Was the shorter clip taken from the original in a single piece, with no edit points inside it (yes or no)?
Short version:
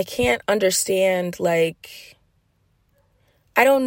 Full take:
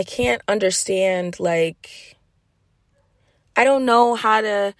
yes